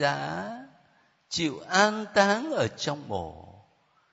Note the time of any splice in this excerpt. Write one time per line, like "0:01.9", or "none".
none